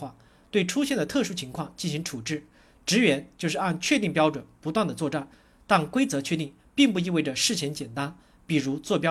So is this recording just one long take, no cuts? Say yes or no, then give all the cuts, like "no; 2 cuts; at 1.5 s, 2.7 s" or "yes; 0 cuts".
yes; 0 cuts